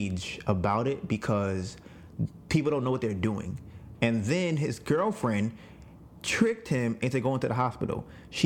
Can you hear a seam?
yes; 1 cut; at 3.9 s

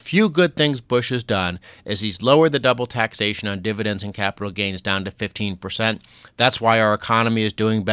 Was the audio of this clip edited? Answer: no; 0 cuts

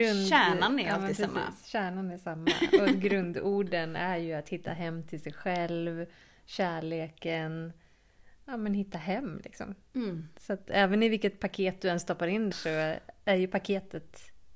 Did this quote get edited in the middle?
yes; 1 cut; at 12.5 s

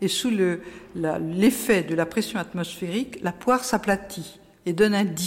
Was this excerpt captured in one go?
yes; 0 cuts

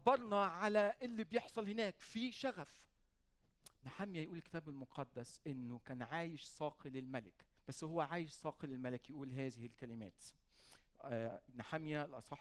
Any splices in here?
yes; 1 cut; at 7.6 s

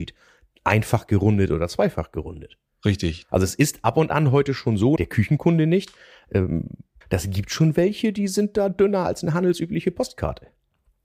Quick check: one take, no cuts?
no; 3 cuts; at 3.3 s, 5.0 s, 7.0 s

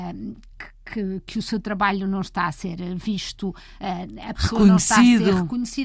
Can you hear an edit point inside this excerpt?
no; 0 cuts

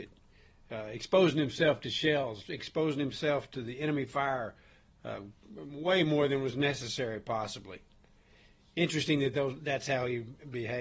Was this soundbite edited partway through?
no; 0 cuts

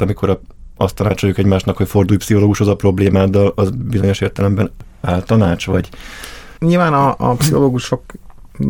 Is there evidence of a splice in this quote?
yes; 1 cut; at 6.6 s

